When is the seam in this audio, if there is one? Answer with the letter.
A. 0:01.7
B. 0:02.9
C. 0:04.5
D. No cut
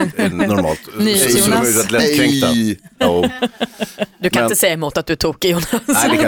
D